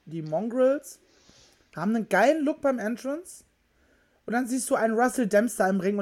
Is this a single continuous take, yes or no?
yes